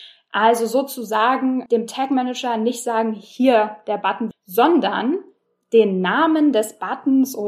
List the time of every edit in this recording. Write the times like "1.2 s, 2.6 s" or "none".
1.7 s, 4.3 s